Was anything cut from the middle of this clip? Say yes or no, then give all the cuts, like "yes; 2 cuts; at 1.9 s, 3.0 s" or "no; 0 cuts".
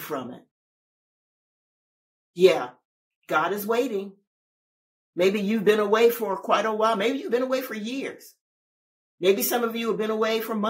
no; 0 cuts